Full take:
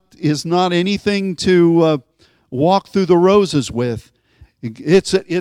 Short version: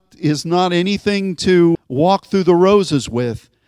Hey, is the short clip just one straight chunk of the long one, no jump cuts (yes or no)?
no